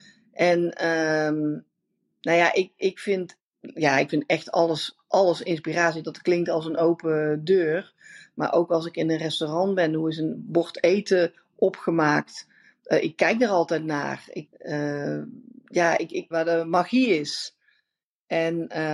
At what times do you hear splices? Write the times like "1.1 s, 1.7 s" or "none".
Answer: 14.5 s, 16.3 s